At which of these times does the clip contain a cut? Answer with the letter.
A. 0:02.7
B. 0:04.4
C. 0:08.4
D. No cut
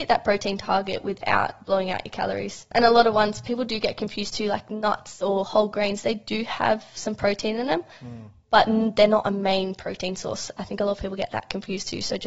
D